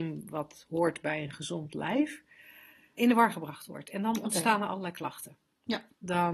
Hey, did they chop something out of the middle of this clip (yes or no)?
yes